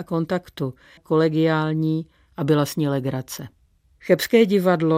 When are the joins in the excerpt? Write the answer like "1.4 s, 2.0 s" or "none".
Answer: 1.0 s